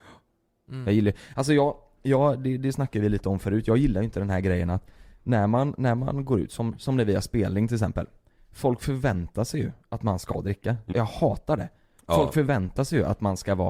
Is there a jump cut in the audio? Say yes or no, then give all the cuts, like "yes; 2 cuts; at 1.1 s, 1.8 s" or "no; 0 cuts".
yes; 1 cut; at 10.9 s